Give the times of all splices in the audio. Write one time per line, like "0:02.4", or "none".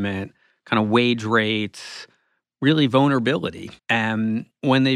0:03.8